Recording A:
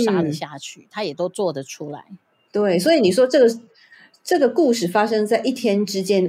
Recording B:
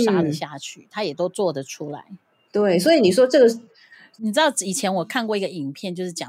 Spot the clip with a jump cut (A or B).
B